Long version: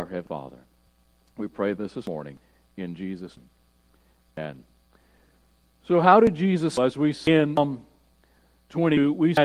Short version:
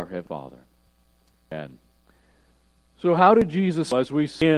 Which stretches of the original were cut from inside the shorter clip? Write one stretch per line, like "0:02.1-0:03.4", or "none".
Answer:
0:01.3-0:04.2